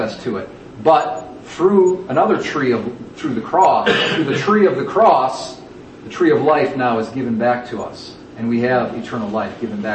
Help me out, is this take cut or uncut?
uncut